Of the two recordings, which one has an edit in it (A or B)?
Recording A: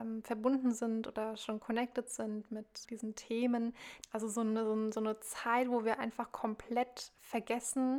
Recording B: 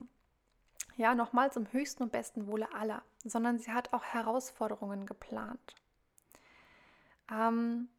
A